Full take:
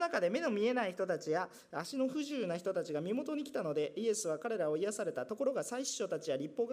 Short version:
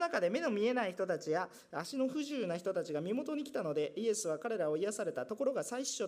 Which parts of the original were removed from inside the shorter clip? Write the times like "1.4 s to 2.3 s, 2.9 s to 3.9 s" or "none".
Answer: none